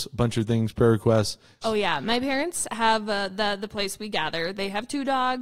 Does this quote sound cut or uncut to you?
cut